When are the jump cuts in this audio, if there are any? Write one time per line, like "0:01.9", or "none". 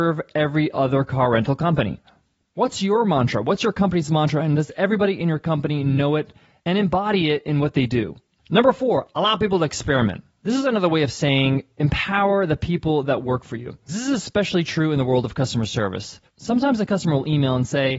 0:13.9
0:16.3